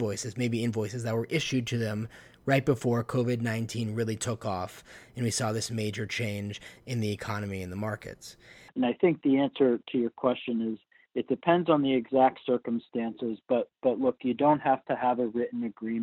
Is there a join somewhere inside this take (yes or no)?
yes